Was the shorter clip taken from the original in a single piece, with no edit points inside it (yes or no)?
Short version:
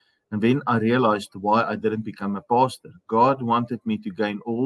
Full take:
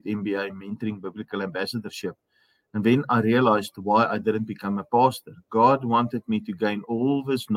yes